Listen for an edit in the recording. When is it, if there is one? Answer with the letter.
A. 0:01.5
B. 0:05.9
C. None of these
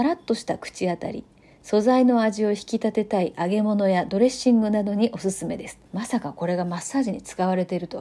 B